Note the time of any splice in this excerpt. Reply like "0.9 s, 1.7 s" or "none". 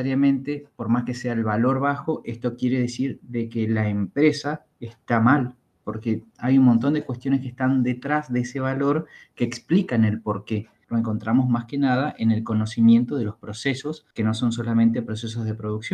10.8 s, 14.1 s